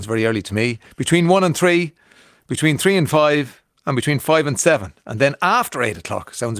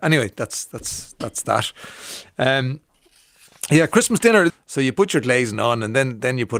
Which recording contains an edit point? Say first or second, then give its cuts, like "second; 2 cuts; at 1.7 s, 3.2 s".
second; 1 cut; at 4.5 s